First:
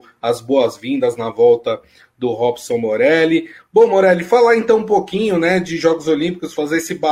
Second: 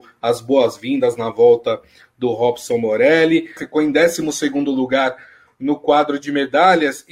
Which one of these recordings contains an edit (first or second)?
second